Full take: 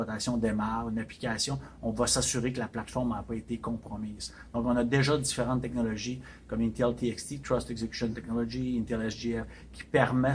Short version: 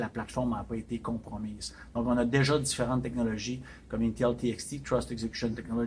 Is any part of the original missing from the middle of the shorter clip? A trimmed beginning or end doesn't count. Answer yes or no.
no